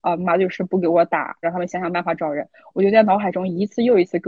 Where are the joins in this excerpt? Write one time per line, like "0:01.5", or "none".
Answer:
0:01.4